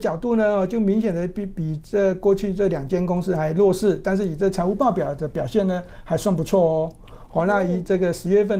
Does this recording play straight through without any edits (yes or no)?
yes